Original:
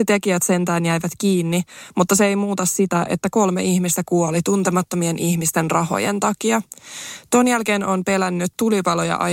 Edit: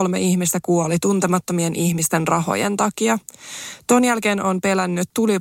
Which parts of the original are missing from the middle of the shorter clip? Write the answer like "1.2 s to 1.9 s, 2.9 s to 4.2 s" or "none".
none